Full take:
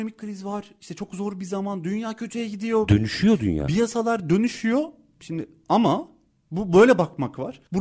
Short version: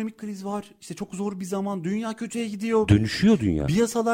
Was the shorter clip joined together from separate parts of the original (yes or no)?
no